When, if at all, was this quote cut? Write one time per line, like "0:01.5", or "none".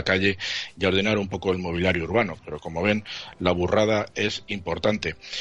0:02.4